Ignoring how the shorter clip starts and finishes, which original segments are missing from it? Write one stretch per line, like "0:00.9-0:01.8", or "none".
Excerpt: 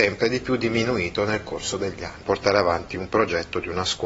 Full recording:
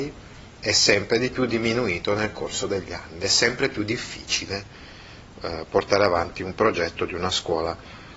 0:03.1-0:05.7